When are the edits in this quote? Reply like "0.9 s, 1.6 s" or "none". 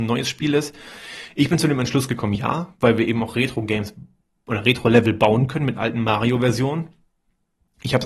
none